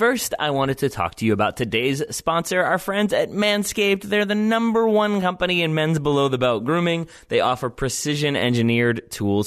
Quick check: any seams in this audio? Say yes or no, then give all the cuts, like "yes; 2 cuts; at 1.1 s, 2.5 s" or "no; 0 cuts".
no; 0 cuts